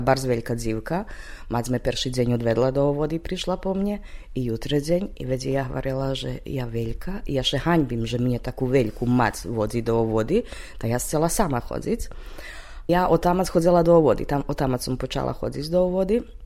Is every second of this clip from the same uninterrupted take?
no; 1 cut; at 12.9 s

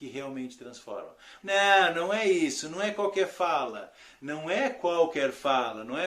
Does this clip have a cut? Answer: yes; 1 cut; at 1.4 s

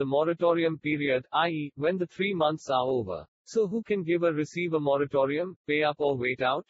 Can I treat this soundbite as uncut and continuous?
no; 2 cuts; at 3.3 s, 5.6 s

